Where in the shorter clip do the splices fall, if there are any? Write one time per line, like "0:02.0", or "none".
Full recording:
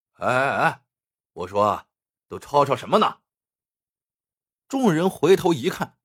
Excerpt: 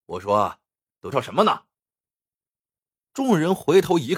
0:01.1